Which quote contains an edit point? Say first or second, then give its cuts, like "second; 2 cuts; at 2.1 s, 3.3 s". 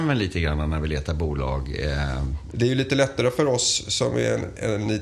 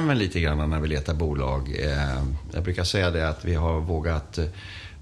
first; 1 cut; at 2.5 s